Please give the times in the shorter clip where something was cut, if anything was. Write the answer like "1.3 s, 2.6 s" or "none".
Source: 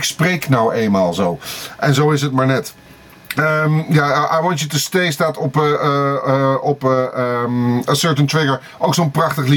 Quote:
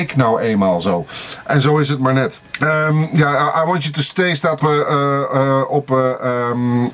2.5 s, 4.6 s